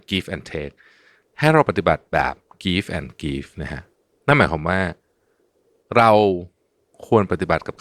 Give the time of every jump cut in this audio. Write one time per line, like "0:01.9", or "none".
none